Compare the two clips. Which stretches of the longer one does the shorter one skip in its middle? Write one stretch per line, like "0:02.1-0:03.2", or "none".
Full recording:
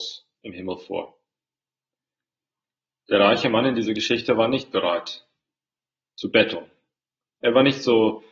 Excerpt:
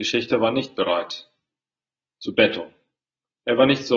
none

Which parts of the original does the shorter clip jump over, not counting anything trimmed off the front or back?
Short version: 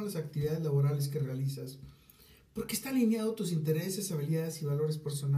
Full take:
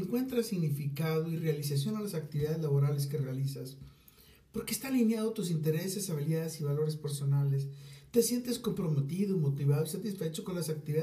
none

